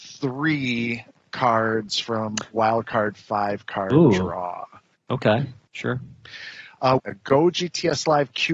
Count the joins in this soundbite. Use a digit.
2